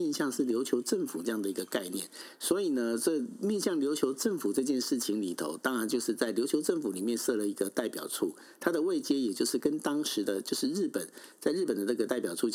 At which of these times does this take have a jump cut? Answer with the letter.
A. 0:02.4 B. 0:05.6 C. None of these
C